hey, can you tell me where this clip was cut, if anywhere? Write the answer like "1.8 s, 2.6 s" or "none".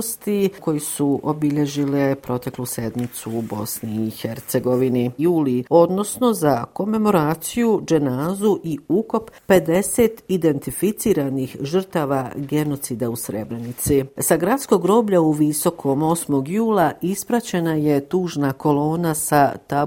5.2 s